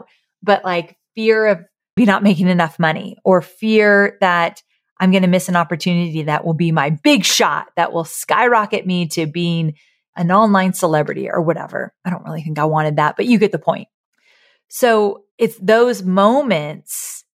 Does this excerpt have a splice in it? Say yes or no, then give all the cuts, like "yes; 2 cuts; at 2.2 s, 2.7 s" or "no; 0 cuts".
yes; 1 cut; at 2.0 s